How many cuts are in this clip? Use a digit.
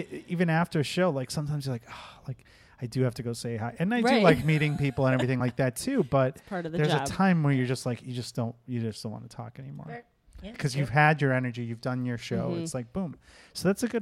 0